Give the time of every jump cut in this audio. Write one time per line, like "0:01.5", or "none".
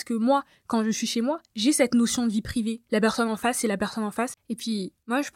0:02.9
0:04.3